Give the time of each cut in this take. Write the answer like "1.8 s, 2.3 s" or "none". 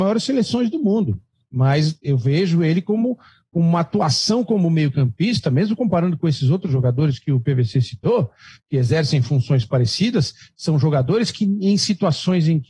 none